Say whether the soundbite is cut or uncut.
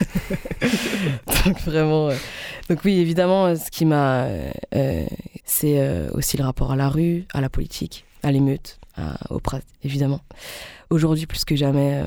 cut